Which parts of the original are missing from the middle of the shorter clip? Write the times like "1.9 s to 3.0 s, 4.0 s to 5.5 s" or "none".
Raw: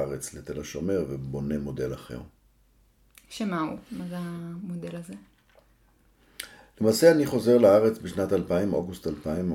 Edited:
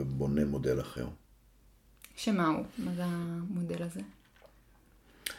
none